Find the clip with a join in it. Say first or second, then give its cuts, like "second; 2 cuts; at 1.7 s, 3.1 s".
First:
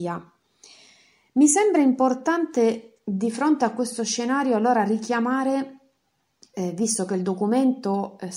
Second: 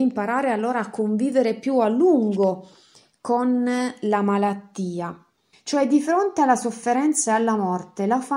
second; 1 cut; at 5.5 s